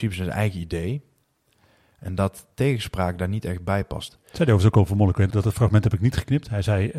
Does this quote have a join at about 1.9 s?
no; 2 cuts; at 4.1 s, 5.3 s

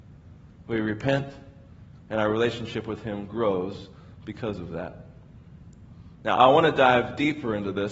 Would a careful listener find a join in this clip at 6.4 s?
yes; 2 cuts; at 2.0 s, 6.4 s

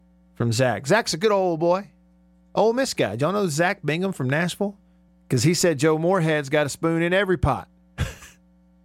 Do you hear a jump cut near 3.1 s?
no; 1 cut; at 5.1 s

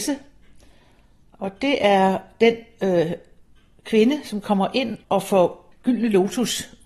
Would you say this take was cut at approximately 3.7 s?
no; 1 cut; at 5.0 s

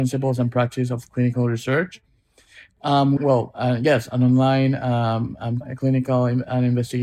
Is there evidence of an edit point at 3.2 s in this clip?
yes; 2 cuts; at 3.2 s, 5.6 s

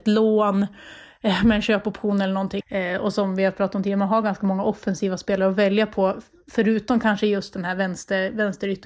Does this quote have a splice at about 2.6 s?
yes; 1 cut; at 2.6 s

